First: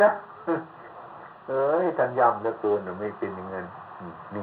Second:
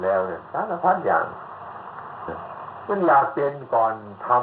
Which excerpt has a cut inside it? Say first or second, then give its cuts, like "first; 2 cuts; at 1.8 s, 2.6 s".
second; 1 cut; at 2.3 s